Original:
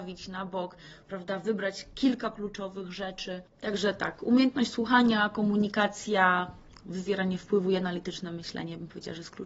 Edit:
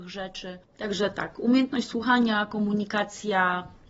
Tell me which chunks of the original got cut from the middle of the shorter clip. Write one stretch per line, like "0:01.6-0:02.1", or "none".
none